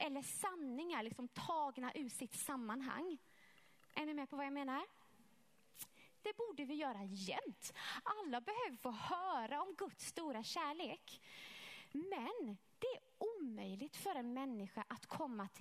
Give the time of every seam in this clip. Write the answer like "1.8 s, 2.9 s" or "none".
6.2 s